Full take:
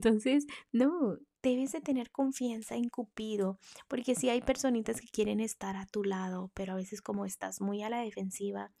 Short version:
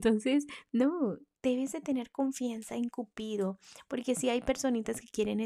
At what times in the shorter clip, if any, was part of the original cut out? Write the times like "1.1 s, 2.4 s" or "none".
none